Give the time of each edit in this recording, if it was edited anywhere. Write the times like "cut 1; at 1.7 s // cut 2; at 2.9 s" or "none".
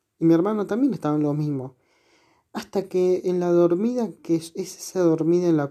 none